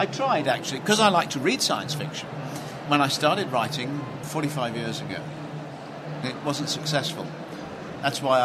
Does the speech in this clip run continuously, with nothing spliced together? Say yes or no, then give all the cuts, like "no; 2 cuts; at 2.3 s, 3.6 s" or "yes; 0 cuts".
no; 1 cut; at 6.2 s